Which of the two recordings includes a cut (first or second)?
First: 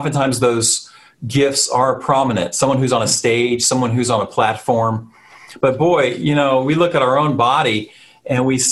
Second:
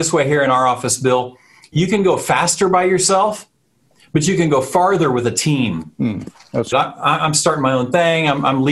second